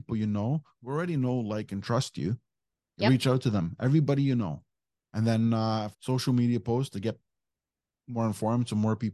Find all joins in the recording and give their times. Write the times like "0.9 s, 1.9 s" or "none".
5.9 s